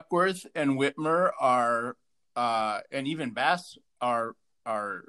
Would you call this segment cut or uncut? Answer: uncut